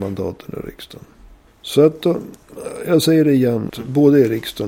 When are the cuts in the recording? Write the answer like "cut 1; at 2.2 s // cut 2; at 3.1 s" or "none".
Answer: cut 1; at 1.5 s // cut 2; at 3.7 s